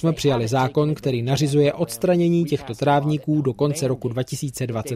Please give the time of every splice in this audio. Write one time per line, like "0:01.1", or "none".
none

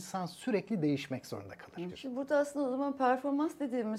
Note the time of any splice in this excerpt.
0:01.9

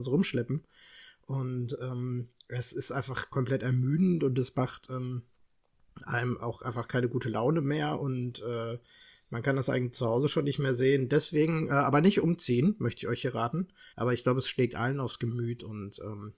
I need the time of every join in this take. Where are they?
0:13.9

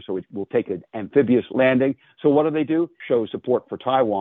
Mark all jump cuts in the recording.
0:03.0

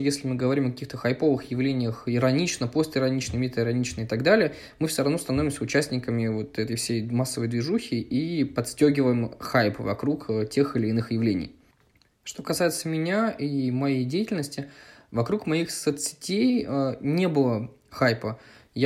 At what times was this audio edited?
none

